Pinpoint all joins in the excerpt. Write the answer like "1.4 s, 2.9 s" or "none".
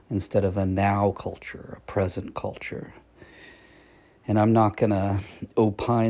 none